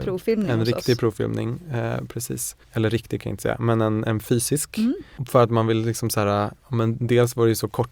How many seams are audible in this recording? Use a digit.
1